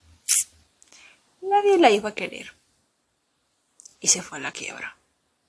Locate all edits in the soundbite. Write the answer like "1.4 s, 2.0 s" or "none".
none